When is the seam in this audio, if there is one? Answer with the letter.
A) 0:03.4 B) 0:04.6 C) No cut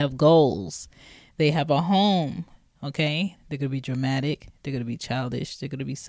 A